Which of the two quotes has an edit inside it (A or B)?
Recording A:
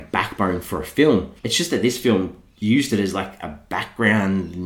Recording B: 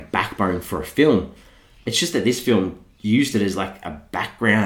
A